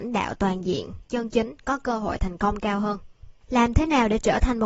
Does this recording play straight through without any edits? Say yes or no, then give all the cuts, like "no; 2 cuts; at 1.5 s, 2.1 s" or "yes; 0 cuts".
no; 1 cut; at 3.4 s